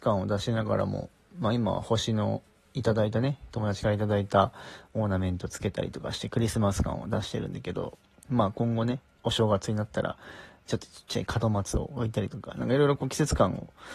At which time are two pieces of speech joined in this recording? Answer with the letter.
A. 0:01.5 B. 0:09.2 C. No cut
B